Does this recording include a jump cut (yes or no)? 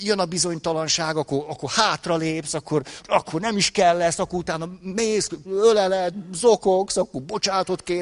yes